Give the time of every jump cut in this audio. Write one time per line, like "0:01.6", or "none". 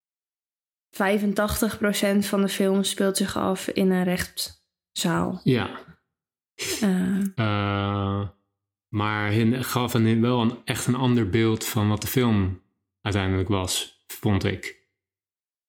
0:07.3